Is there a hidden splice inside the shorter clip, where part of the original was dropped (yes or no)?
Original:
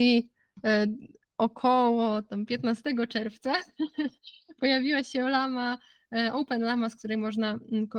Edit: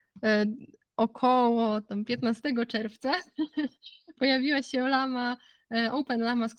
no